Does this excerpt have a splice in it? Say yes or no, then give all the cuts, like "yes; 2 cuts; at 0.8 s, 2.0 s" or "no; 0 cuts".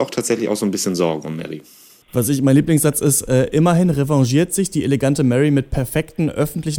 no; 0 cuts